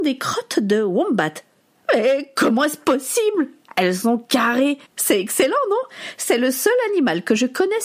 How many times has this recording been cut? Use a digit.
1